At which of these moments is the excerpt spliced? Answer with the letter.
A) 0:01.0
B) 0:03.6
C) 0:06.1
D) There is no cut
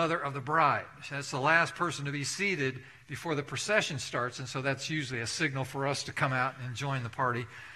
D